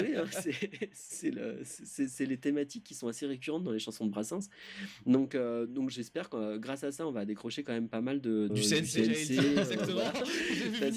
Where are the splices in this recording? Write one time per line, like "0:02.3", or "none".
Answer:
0:08.5